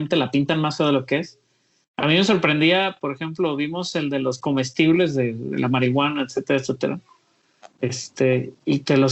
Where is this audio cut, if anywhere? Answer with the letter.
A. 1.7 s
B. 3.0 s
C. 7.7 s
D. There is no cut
D